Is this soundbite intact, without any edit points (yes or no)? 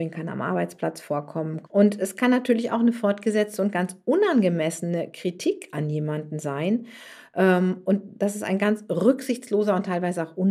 no